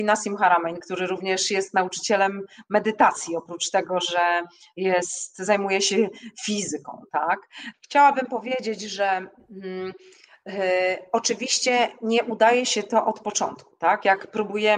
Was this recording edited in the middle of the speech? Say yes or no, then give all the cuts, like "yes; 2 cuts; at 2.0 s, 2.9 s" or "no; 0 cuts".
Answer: yes; 1 cut; at 7.7 s